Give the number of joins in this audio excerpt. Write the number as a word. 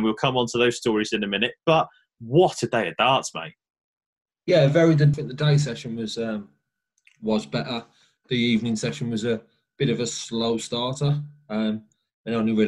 one